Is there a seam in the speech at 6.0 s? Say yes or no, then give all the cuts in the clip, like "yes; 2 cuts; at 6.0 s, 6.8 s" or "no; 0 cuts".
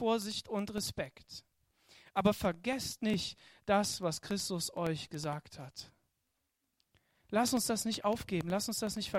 no; 0 cuts